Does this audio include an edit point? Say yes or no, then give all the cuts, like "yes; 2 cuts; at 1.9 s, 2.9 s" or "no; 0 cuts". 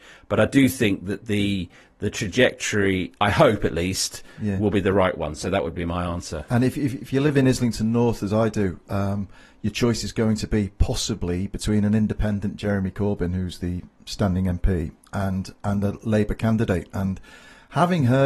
no; 0 cuts